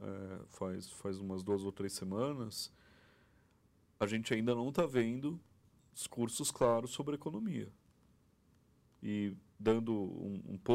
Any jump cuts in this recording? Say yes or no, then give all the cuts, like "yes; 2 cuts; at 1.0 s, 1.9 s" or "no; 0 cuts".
no; 0 cuts